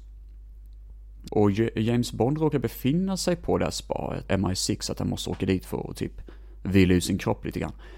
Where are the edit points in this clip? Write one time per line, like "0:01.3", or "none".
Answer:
0:01.3
0:04.3